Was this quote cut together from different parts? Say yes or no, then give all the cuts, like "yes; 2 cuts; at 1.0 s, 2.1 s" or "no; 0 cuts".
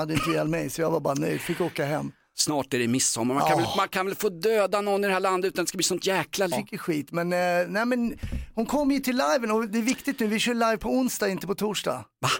yes; 1 cut; at 6.5 s